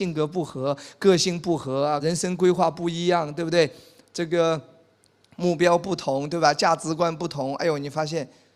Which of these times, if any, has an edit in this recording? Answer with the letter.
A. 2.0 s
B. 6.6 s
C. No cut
A